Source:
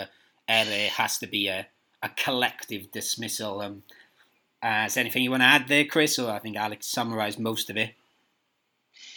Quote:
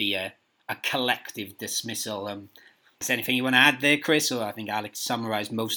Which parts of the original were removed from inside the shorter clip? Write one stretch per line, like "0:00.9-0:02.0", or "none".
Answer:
0:04.3-0:04.9